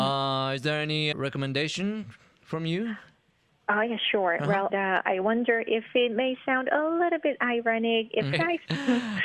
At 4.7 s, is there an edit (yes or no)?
yes